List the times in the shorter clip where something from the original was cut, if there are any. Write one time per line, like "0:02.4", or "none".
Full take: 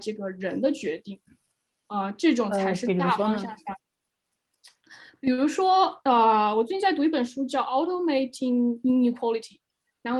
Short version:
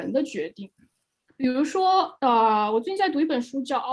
0:01.3